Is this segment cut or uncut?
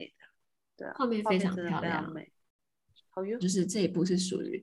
cut